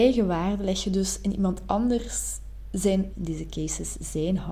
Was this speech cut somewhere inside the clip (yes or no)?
yes